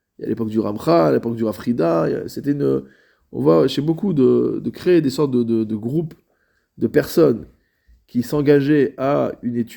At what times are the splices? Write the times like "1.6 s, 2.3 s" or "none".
none